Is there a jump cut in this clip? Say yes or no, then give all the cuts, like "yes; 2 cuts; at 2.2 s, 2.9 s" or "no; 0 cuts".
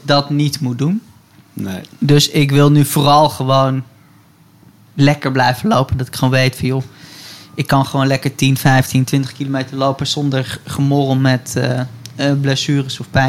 no; 0 cuts